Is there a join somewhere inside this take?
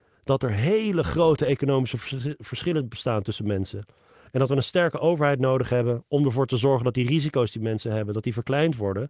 no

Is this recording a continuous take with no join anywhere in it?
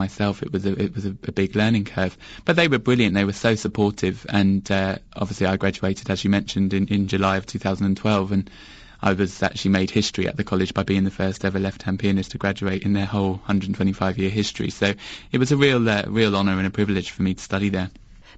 yes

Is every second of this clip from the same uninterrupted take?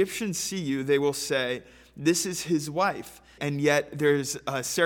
no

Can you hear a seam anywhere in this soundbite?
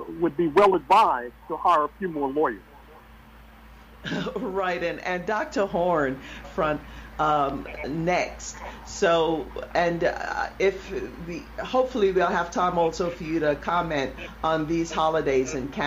yes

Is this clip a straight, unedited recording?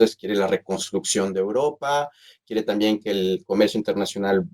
yes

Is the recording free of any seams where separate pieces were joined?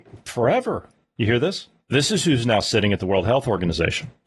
yes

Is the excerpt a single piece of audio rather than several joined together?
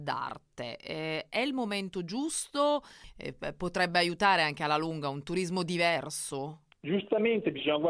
yes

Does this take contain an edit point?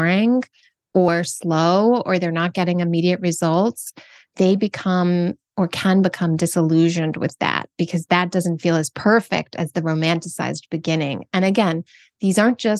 no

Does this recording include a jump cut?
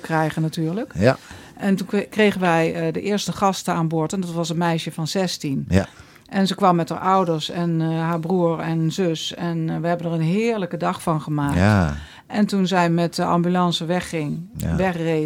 no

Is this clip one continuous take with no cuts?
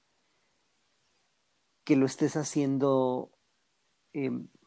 yes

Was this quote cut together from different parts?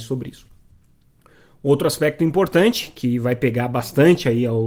no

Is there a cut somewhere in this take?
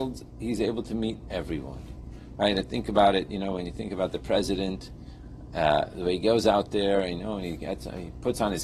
no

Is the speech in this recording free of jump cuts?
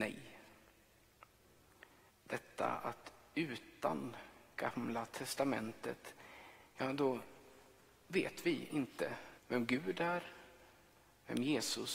no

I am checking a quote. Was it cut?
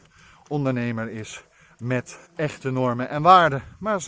yes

